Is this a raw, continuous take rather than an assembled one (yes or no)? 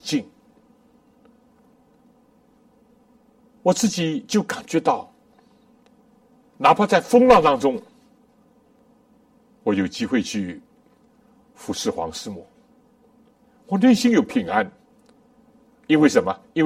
yes